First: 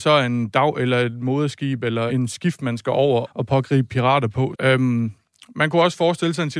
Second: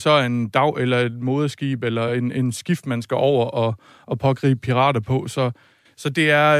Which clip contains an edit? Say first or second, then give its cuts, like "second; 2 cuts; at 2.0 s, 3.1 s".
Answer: first; 3 cuts; at 2.1 s, 3.2 s, 4.5 s